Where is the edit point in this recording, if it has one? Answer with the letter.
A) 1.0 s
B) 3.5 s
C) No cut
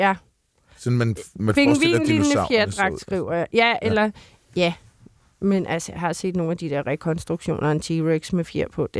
C